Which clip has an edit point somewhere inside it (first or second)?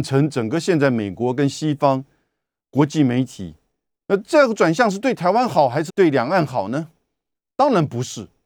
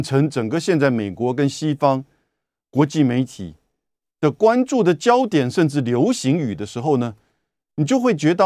first